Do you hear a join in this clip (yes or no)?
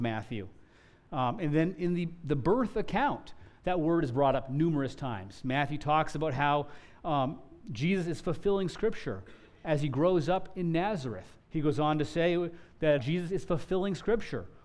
yes